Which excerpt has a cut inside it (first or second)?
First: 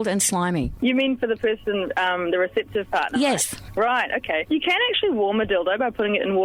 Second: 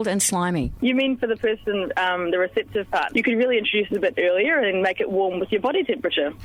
second